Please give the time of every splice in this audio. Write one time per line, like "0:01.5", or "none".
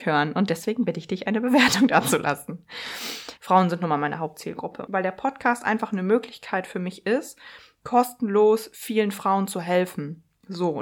0:03.4
0:04.9